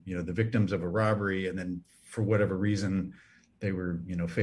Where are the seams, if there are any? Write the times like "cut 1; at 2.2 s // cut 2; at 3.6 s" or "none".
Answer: none

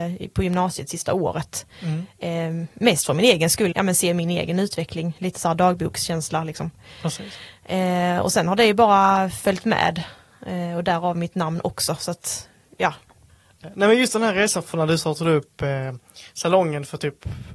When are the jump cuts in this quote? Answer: cut 1; at 3.7 s

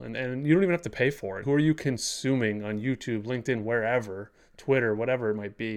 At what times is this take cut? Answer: cut 1; at 1.4 s

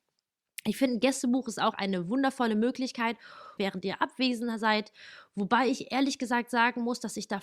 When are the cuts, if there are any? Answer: cut 1; at 1.7 s // cut 2; at 3.6 s

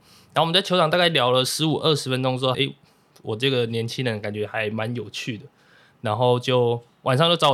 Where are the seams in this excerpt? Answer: cut 1; at 2.5 s

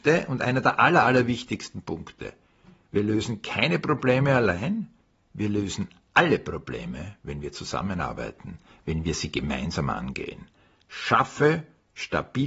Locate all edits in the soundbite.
none

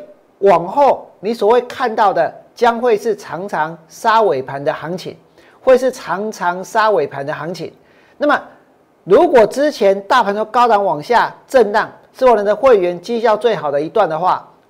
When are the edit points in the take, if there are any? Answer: none

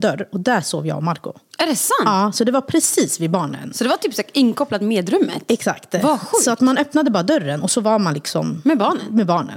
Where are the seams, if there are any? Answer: none

